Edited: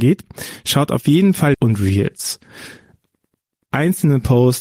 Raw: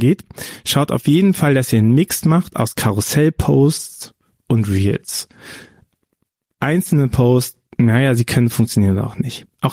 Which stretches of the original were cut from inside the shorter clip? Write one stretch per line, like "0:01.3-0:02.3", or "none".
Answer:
0:01.5-0:04.4